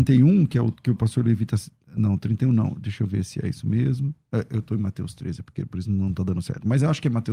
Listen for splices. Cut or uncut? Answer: uncut